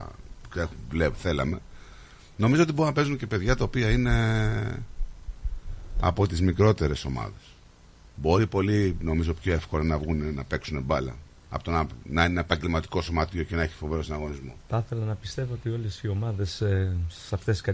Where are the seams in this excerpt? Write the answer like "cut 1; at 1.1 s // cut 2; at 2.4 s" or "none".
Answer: none